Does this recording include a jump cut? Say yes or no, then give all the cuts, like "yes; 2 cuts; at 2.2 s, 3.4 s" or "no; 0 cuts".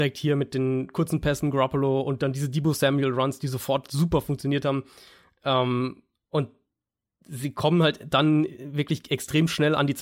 no; 0 cuts